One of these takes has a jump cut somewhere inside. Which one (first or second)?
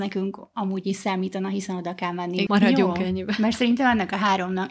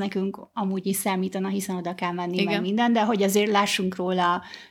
first